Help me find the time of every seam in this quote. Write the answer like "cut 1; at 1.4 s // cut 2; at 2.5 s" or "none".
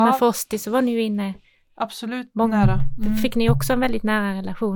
none